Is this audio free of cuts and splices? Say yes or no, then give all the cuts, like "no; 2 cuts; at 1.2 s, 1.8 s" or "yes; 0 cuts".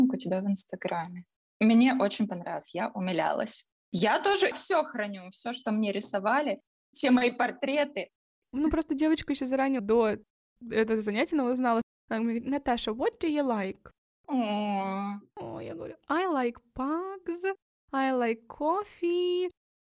yes; 0 cuts